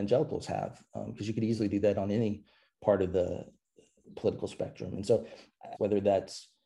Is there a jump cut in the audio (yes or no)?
yes